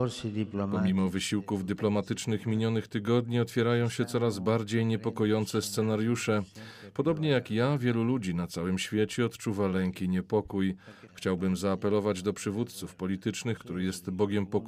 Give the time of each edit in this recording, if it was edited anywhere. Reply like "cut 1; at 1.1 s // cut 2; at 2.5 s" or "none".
cut 1; at 11.1 s // cut 2; at 13.6 s